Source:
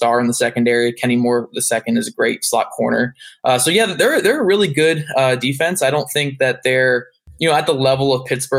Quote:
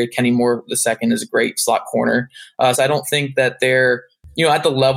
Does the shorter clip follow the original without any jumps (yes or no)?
no